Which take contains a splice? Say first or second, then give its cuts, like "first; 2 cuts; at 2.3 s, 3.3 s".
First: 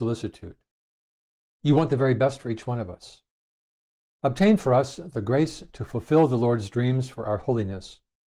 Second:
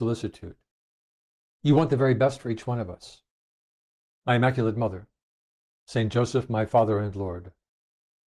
second; 1 cut; at 4.1 s